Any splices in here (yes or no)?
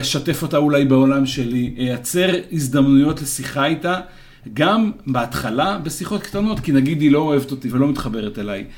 yes